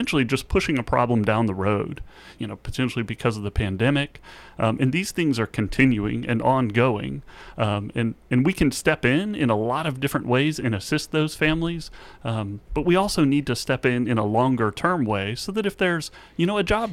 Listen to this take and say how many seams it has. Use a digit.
1